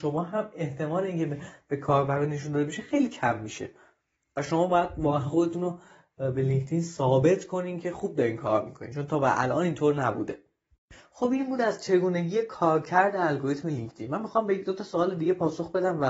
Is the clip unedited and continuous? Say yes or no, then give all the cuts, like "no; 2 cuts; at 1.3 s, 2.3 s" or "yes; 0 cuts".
yes; 0 cuts